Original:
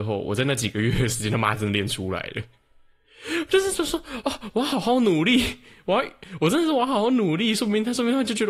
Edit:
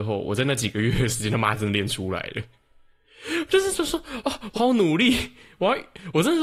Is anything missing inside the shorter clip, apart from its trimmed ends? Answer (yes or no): yes